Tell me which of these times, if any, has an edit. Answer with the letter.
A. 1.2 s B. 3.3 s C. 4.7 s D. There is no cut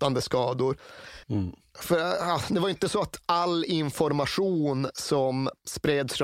A